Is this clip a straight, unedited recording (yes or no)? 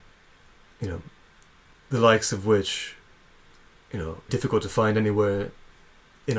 no